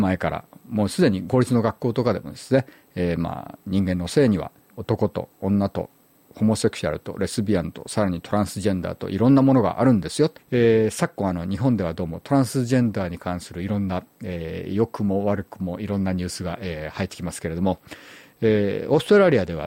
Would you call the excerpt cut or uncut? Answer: cut